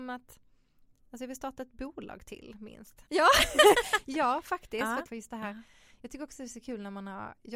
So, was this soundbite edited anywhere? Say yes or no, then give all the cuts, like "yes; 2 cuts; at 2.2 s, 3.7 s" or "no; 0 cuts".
yes; 2 cuts; at 3.1 s, 5.1 s